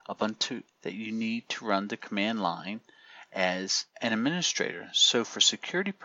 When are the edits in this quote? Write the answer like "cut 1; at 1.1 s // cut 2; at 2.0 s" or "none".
cut 1; at 3.9 s